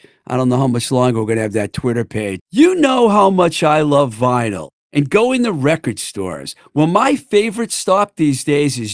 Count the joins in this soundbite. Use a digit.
1